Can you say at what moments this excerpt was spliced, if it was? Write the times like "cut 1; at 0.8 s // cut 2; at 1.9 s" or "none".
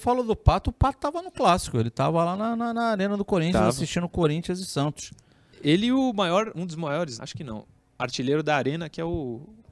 cut 1; at 7.2 s